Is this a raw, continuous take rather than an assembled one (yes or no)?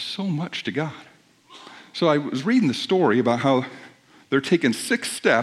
yes